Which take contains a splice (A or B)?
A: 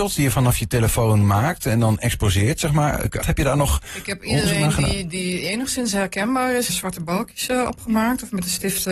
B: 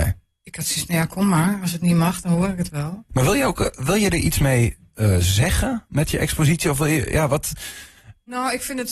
A